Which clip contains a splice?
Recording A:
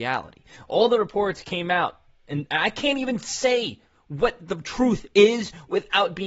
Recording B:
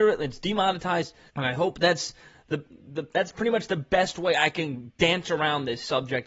B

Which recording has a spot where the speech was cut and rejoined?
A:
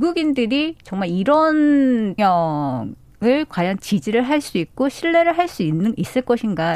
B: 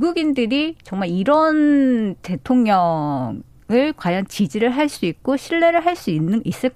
A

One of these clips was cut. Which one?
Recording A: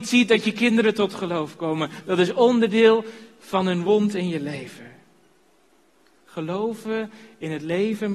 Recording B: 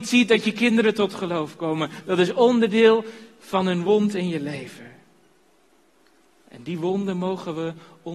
A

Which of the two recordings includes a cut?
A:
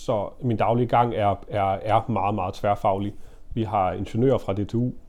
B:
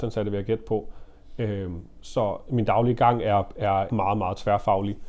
B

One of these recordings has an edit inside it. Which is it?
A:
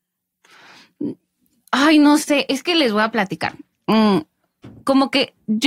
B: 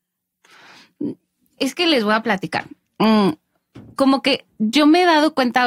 B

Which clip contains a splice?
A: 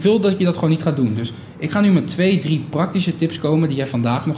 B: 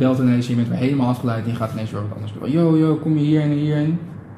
B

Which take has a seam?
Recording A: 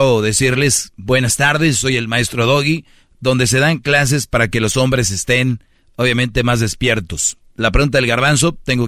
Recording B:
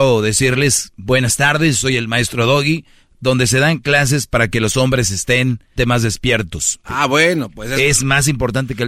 B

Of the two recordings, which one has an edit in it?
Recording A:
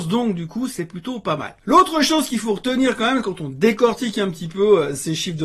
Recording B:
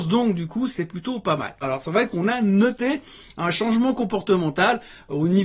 B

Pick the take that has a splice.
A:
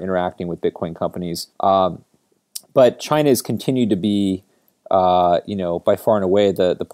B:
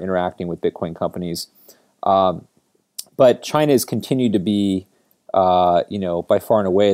A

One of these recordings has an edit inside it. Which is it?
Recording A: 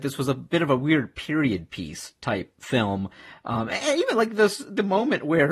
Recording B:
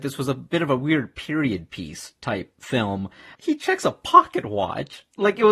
B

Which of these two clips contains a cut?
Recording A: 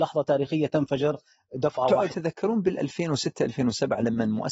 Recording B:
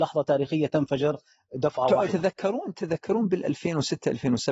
A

